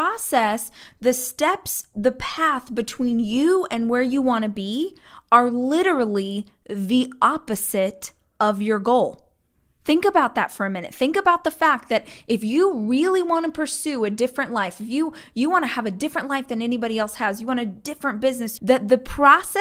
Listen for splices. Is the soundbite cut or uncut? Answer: cut